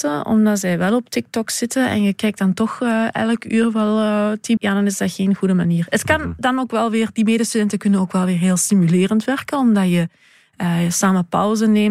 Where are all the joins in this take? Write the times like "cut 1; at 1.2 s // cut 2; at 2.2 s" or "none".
cut 1; at 4.6 s